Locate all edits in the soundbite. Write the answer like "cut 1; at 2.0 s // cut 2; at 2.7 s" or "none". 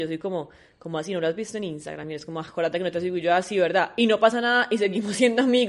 none